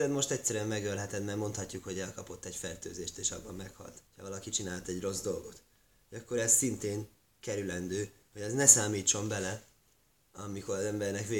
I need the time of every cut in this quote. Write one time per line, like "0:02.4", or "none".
0:04.1